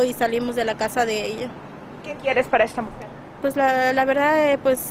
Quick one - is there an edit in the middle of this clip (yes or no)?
no